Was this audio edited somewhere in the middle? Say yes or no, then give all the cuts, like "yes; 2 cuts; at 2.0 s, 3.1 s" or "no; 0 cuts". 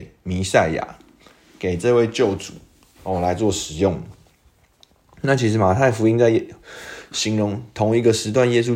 no; 0 cuts